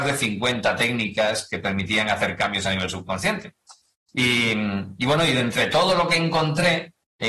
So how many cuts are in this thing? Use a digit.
0